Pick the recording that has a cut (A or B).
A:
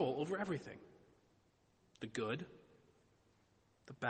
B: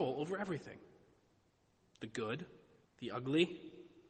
B